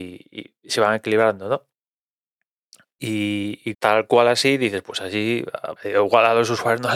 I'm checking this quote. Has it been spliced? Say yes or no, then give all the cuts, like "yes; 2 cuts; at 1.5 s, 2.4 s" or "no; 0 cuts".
yes; 2 cuts; at 3.7 s, 5.8 s